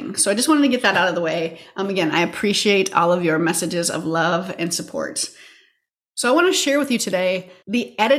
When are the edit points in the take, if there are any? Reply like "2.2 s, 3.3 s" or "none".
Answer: none